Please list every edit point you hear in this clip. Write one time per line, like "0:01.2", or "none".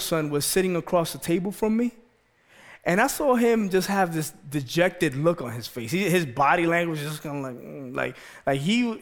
none